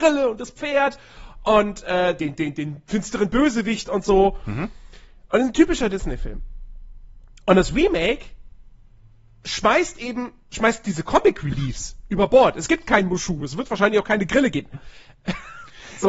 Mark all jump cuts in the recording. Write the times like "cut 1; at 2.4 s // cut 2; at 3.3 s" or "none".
cut 1; at 14.7 s